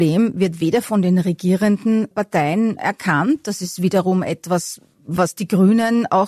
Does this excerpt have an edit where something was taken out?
no; 0 cuts

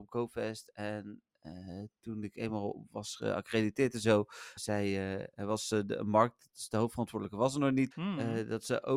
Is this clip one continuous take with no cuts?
no; 2 cuts; at 4.6 s, 7.9 s

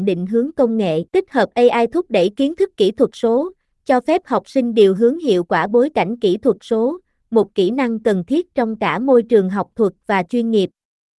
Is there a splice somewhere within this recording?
yes; 1 cut; at 1.1 s

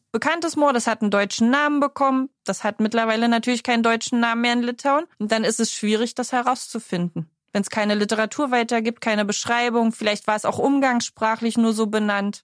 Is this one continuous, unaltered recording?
no; 1 cut; at 5.1 s

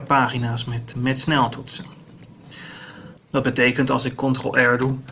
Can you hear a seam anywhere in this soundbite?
yes; 2 cuts; at 0.9 s, 3.2 s

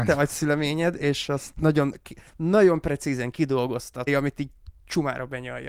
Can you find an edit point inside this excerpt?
yes; 2 cuts; at 2.3 s, 4.1 s

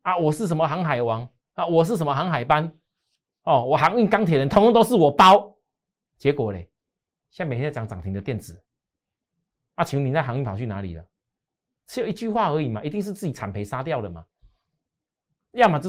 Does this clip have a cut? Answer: no; 0 cuts

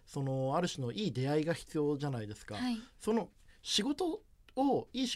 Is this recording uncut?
yes; 0 cuts

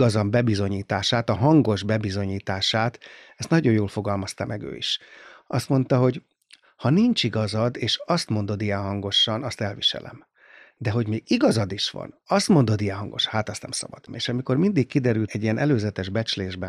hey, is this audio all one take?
no; 2 cuts; at 14.1 s, 15.3 s

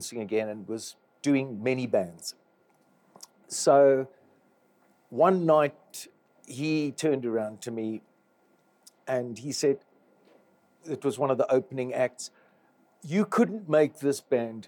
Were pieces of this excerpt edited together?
no; 0 cuts

